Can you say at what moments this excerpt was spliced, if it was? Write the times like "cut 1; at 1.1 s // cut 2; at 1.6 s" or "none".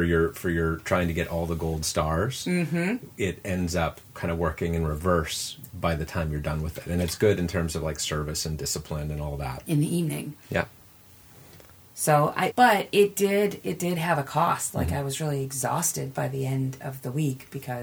cut 1; at 9.7 s // cut 2; at 12.5 s

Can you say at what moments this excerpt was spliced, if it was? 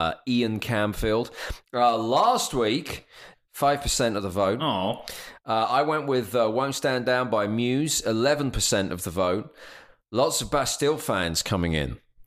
cut 1; at 3.3 s

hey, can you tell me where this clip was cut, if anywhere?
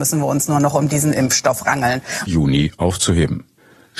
cut 1; at 2.3 s

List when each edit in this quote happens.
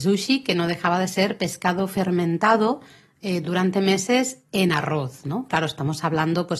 none

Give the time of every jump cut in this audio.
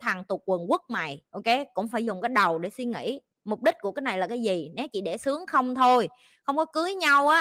cut 1; at 1.3 s

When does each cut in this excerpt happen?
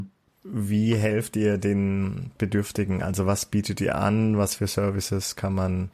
none

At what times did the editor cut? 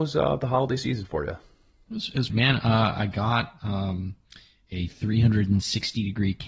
cut 1; at 2.3 s

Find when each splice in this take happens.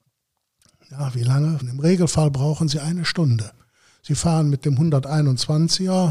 cut 1; at 1.6 s

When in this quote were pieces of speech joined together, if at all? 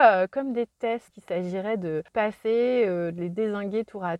cut 1; at 1.1 s

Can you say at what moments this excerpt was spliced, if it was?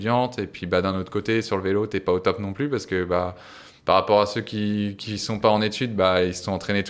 none

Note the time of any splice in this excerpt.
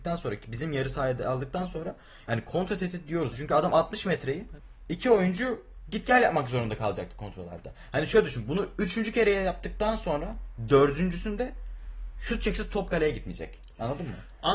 cut 1; at 3.3 s

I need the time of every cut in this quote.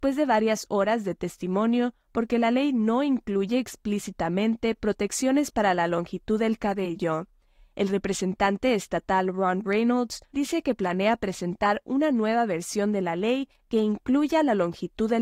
cut 1; at 10.3 s

